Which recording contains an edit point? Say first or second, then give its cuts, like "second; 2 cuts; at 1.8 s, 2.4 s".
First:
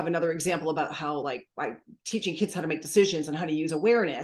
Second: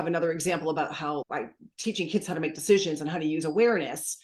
second; 1 cut; at 1.2 s